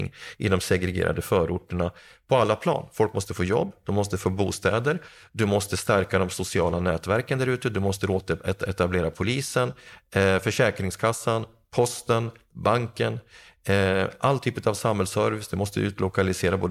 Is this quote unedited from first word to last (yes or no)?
yes